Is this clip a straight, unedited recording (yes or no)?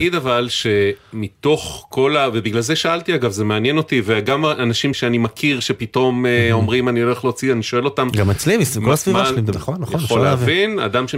no